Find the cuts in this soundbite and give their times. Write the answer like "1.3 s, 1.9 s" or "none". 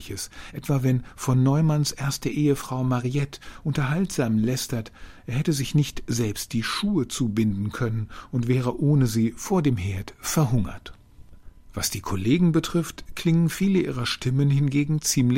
none